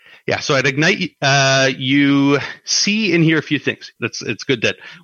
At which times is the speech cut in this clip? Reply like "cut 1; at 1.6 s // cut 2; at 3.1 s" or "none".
cut 1; at 4.0 s

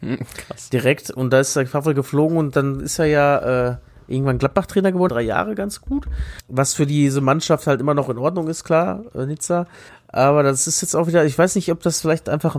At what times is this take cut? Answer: cut 1; at 5.1 s // cut 2; at 6.4 s

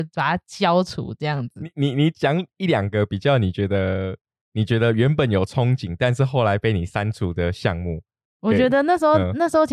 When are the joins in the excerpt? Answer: none

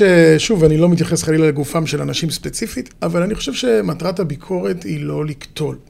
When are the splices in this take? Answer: cut 1; at 2.9 s

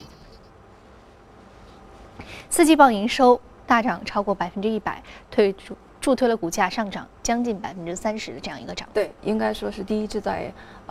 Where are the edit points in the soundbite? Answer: cut 1; at 9.2 s

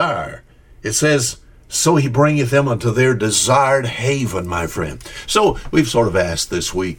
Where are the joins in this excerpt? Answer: none

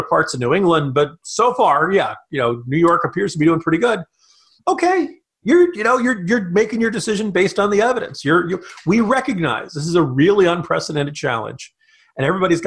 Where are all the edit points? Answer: cut 1; at 4.6 s

